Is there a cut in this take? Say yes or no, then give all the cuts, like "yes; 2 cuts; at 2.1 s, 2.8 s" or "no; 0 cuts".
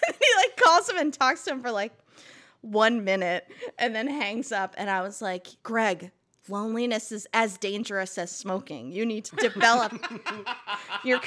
yes; 2 cuts; at 5.6 s, 9.3 s